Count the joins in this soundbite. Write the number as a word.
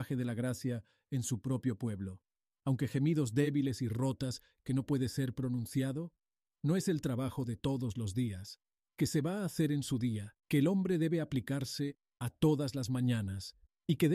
one